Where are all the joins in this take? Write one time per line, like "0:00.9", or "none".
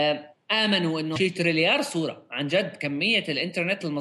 0:01.2